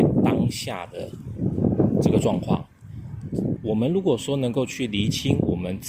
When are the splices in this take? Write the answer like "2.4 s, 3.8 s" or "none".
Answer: 3.6 s